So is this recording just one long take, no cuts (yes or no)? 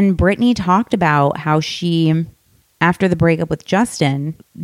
yes